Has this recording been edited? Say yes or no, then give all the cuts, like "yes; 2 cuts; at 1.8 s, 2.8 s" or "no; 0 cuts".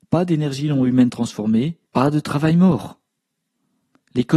yes; 1 cut; at 1.9 s